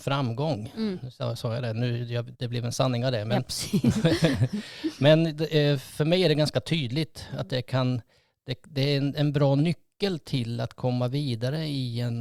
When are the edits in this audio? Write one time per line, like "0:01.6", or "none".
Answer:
0:02.3